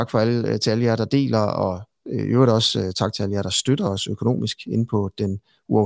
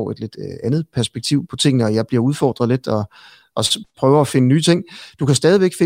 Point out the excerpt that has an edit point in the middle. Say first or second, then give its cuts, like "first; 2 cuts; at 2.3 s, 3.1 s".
second; 1 cut; at 1.5 s